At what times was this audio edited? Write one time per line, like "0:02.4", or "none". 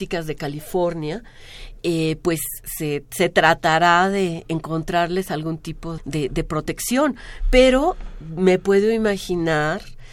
0:06.0